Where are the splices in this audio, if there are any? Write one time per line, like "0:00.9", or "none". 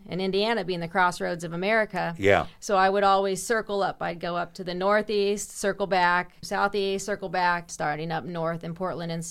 0:06.4
0:07.7